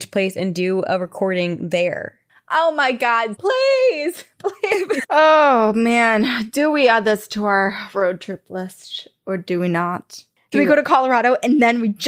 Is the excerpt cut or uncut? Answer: cut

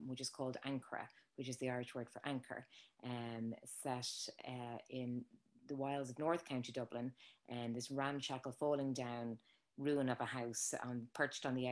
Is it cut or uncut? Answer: uncut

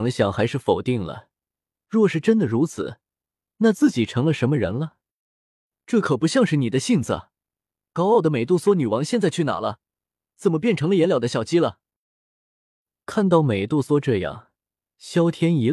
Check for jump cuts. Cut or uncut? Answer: uncut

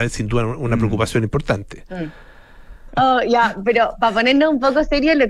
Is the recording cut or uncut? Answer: cut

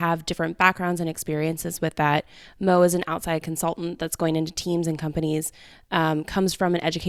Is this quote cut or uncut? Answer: uncut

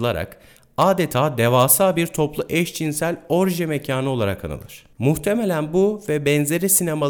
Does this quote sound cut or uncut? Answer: cut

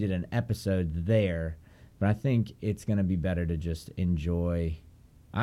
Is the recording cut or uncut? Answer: uncut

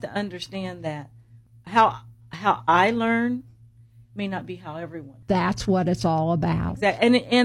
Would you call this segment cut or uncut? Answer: cut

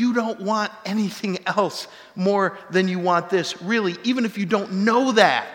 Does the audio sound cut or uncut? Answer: uncut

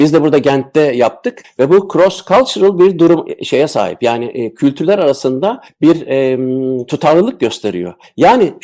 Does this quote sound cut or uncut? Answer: uncut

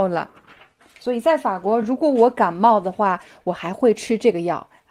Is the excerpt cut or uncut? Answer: uncut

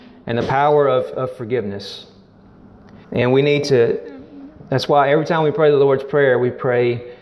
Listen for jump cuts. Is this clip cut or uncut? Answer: cut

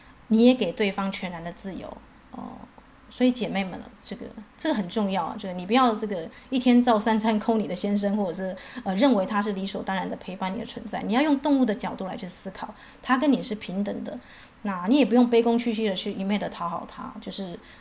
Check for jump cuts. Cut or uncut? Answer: uncut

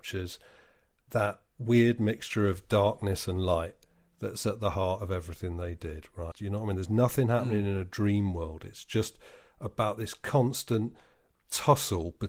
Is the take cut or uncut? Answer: cut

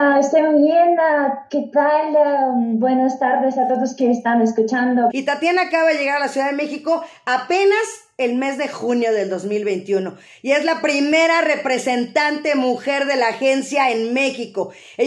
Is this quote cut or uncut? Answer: cut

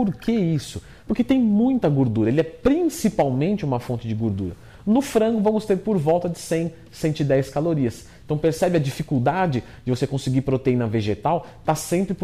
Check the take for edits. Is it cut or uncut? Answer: uncut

